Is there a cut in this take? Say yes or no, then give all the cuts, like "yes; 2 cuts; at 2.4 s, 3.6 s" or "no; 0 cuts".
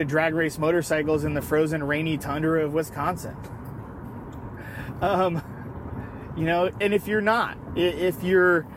no; 0 cuts